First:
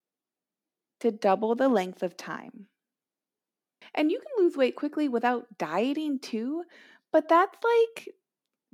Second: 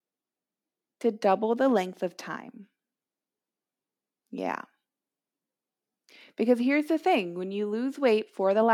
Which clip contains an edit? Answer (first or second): first